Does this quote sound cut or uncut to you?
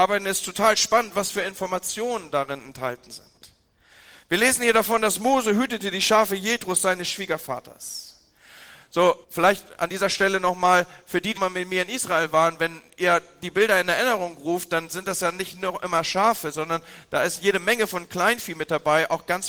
cut